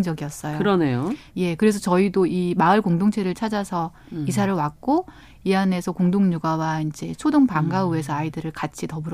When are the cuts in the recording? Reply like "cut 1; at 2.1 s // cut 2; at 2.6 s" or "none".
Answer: cut 1; at 1.3 s